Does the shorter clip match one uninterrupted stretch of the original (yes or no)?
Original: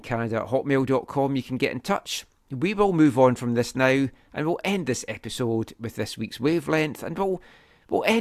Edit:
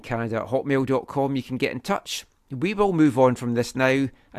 yes